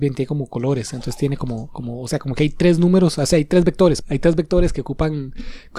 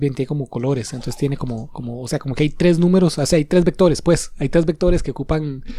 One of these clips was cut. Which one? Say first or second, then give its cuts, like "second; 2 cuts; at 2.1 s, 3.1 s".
first; 1 cut; at 4.0 s